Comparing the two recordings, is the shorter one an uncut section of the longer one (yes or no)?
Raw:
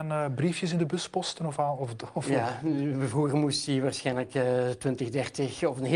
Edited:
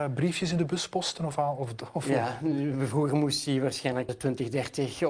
no